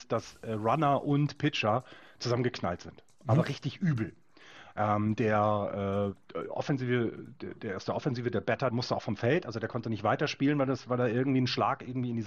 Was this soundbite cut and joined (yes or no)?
yes